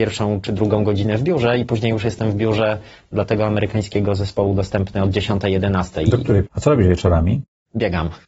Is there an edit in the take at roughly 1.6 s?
no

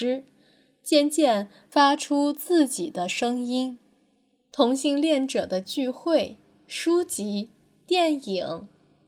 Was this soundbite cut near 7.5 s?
no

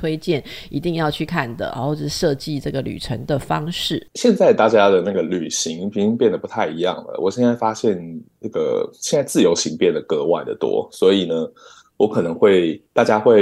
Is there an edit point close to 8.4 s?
no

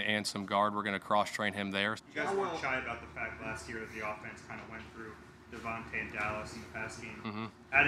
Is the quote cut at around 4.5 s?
no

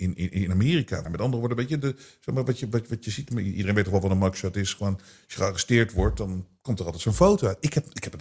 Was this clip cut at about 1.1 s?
yes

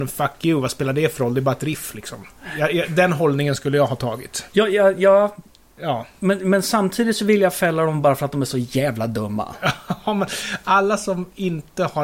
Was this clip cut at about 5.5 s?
no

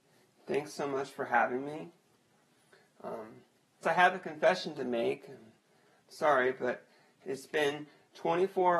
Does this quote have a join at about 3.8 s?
yes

